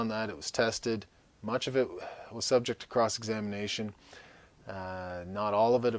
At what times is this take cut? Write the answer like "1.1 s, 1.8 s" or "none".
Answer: none